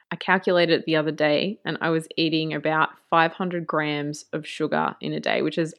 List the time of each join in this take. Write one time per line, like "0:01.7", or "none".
none